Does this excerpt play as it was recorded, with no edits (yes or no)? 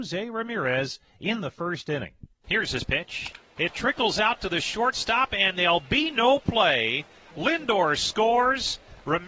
no